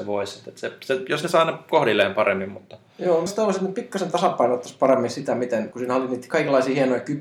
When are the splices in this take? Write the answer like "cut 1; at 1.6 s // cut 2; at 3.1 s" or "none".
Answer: cut 1; at 3.3 s // cut 2; at 5.7 s